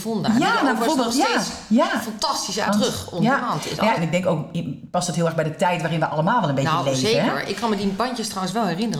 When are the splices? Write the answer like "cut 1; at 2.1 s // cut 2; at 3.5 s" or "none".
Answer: cut 1; at 2.7 s // cut 2; at 4.0 s